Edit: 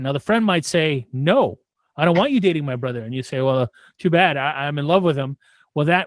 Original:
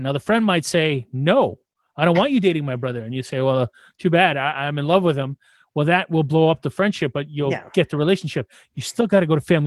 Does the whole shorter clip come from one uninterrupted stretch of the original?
yes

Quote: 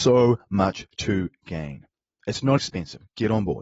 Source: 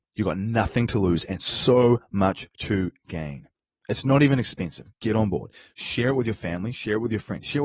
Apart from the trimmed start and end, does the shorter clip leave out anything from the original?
yes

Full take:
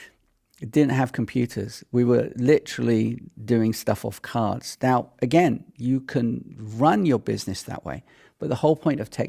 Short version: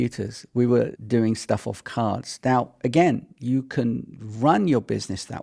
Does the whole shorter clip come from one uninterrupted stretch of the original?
no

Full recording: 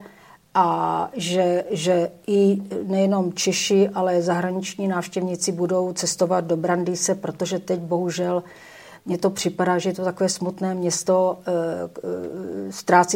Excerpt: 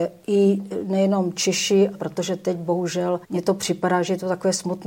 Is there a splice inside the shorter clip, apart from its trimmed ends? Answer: yes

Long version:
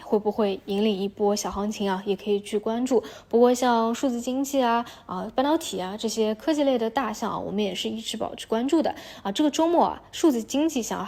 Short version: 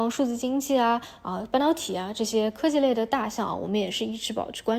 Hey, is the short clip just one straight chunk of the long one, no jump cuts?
yes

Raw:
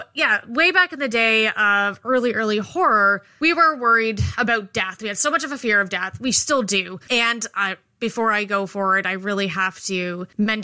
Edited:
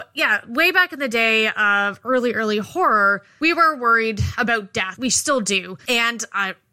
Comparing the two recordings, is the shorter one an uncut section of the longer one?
no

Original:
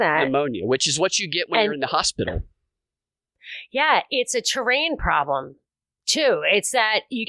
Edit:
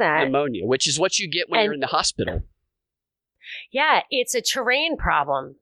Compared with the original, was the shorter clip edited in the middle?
no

